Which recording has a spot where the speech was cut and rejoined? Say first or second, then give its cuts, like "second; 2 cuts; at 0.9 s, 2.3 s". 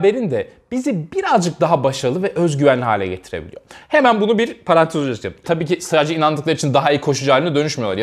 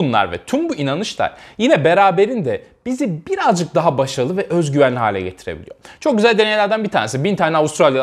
first; 2 cuts; at 3.8 s, 5.4 s